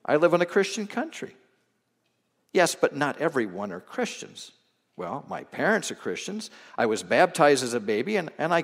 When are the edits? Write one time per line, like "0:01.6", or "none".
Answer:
none

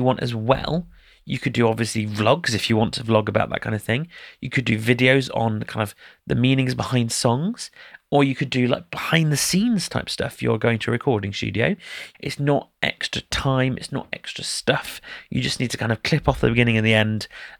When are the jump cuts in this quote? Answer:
0:12.1

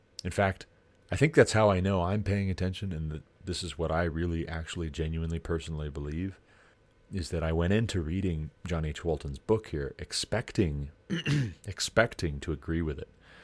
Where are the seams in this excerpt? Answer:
none

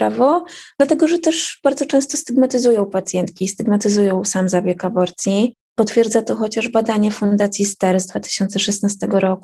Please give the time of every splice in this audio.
none

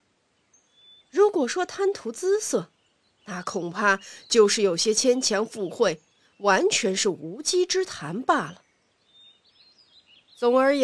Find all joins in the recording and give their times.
none

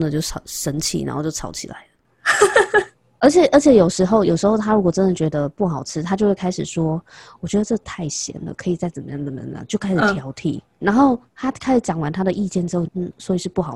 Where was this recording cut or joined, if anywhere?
0:10.8
0:12.9

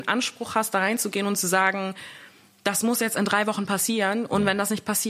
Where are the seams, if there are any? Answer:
none

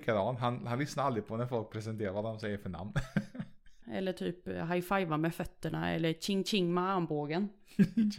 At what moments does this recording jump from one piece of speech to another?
0:03.8

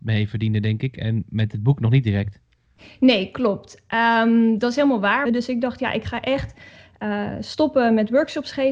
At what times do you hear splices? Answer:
0:05.2

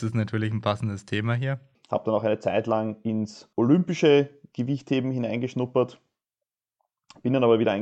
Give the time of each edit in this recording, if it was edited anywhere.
0:01.7
0:03.5

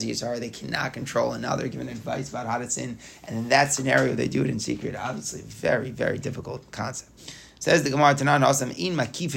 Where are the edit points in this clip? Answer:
0:07.2

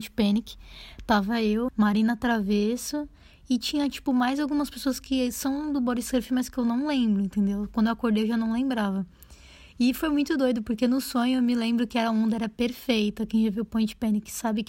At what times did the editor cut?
0:01.7

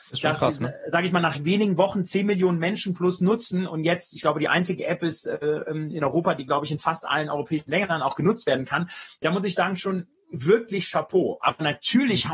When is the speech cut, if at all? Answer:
none

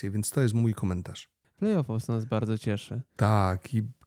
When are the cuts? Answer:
0:01.4

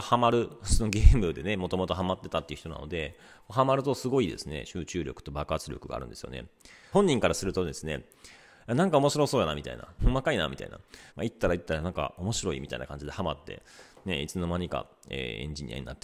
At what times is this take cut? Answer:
0:06.9
0:10.0
0:11.1

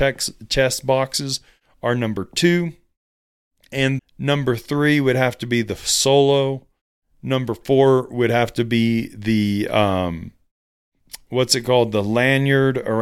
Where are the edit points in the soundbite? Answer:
0:04.0

